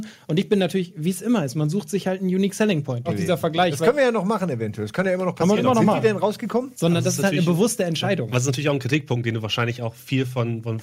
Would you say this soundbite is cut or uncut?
cut